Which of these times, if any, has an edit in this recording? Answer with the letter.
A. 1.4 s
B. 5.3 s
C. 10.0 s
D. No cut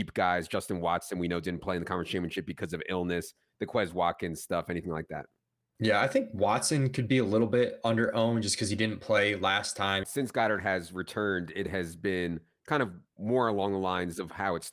C